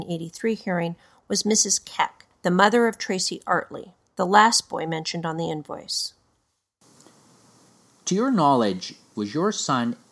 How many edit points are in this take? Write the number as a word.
one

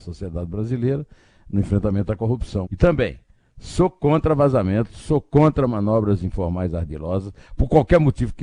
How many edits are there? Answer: two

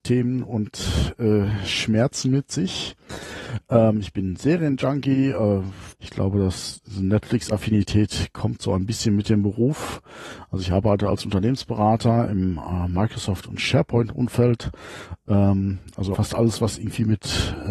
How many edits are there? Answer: two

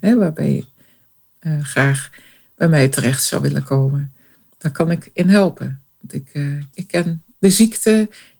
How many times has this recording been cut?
one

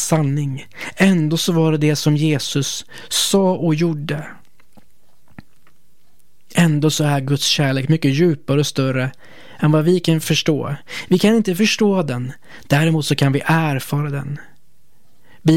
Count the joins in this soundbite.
zero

